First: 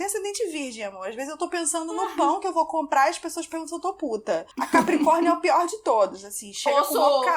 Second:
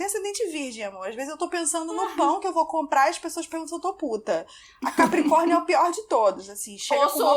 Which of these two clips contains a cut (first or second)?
first